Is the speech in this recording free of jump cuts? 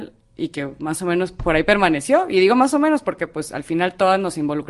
yes; 0 cuts

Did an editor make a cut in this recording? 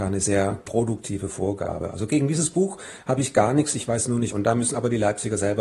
yes; 1 cut; at 4.3 s

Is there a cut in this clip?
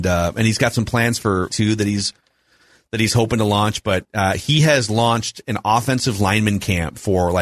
yes; 1 cut; at 1.5 s

